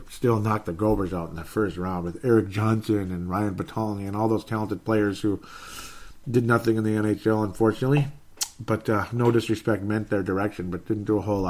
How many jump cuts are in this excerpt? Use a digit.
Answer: 0